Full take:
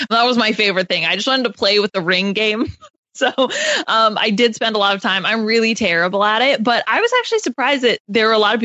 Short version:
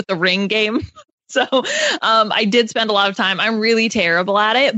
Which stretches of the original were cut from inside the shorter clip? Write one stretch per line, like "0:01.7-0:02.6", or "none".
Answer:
none